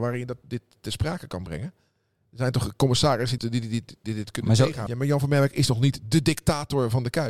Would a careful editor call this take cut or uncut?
cut